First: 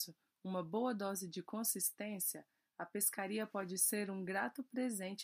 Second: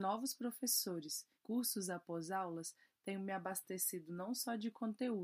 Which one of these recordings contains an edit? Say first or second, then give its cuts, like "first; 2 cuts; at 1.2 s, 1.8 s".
second; 1 cut; at 1.3 s